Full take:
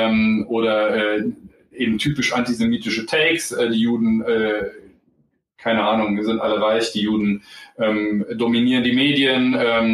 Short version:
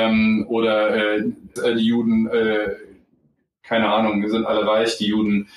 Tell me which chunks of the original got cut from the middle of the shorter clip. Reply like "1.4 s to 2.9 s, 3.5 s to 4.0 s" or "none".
1.6 s to 3.5 s